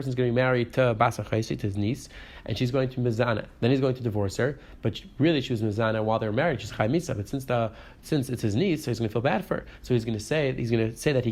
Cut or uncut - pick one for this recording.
uncut